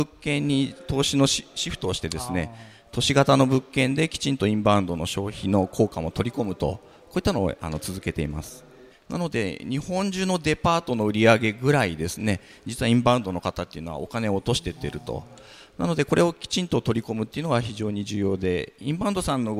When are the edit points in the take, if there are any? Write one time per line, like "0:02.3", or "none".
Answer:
0:08.9